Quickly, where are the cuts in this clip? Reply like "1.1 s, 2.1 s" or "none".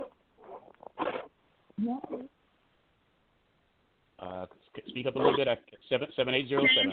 5.8 s

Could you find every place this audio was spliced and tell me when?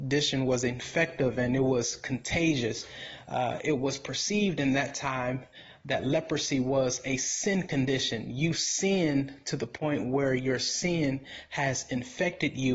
none

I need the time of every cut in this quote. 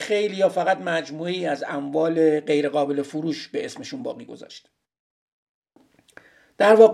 none

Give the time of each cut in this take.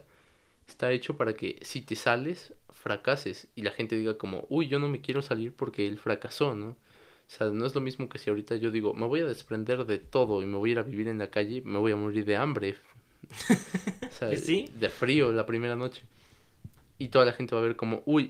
none

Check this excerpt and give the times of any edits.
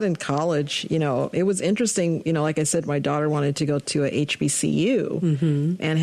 1.3 s

